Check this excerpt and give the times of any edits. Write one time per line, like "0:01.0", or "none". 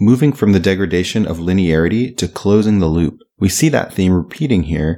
none